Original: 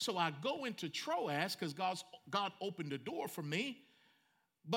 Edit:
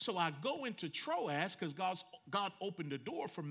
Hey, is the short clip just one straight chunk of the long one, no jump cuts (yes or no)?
yes